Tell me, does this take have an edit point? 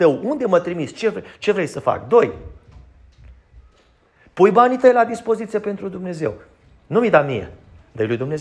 no; 0 cuts

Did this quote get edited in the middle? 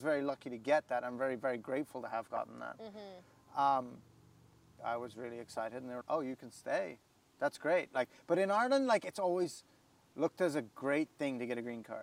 yes; 2 cuts; at 4.8 s, 6.0 s

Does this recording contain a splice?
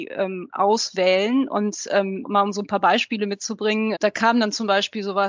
yes; 2 cuts; at 2.2 s, 3.9 s

